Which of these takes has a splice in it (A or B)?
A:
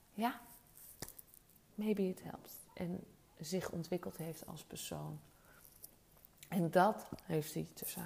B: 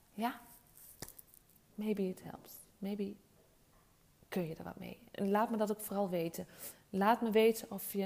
A